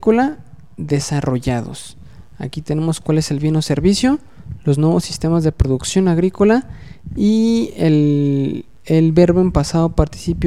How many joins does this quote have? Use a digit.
0